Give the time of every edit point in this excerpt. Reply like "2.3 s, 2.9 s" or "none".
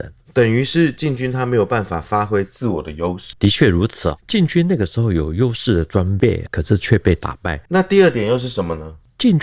3.3 s, 7.7 s